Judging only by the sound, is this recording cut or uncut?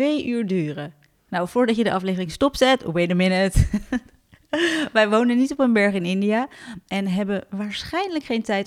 uncut